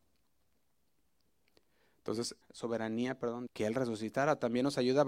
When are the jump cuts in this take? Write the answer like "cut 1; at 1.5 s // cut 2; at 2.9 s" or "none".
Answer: cut 1; at 2.4 s // cut 2; at 3.5 s